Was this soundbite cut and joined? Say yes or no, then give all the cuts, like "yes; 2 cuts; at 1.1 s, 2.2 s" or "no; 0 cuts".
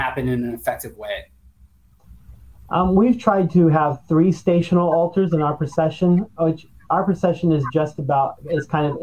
no; 0 cuts